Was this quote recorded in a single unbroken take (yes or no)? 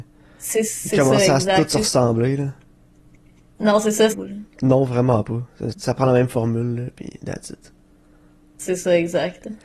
no